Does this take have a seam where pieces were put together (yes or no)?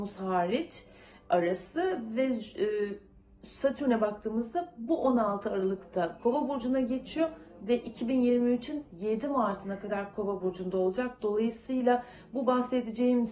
no